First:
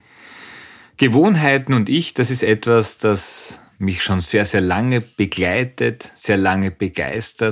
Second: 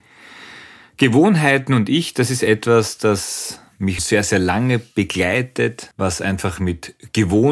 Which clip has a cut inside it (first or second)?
second